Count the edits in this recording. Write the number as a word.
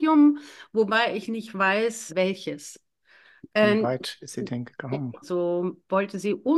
three